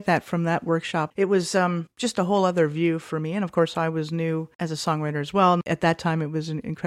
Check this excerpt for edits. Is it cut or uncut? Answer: cut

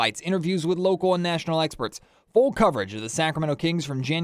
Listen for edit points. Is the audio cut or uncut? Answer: uncut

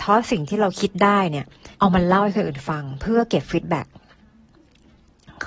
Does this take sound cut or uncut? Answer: cut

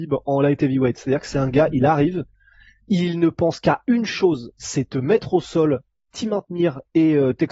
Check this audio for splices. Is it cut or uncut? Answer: uncut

